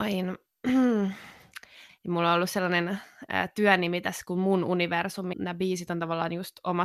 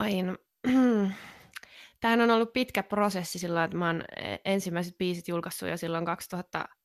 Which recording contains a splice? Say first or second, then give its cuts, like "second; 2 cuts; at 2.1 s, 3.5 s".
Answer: first; 2 cuts; at 1.9 s, 5.3 s